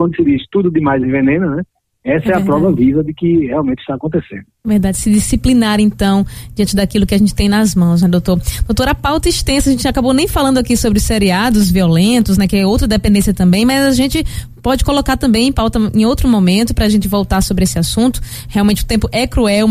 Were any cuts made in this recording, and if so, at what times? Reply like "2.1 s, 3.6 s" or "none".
none